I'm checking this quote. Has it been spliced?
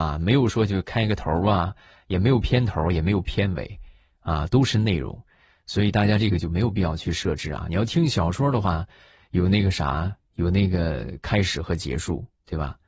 no; 0 cuts

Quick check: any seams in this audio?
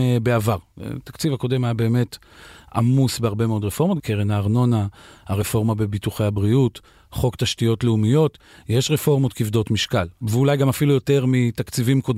yes; 1 cut; at 4.0 s

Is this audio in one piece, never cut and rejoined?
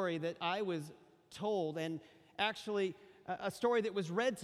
yes; 0 cuts

